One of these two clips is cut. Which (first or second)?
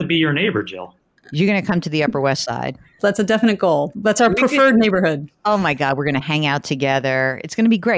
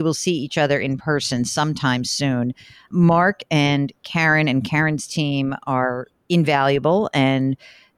first